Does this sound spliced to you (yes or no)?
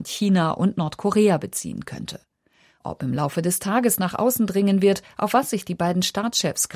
no